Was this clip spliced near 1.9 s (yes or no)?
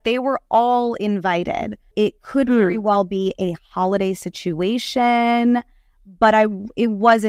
yes